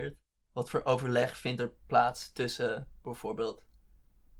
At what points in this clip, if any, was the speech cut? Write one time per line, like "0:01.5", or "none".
none